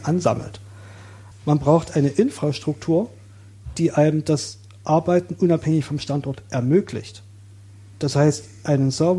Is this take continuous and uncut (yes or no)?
no